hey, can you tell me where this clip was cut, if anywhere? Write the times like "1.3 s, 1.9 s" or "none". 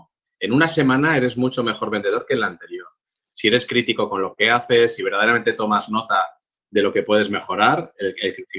5.0 s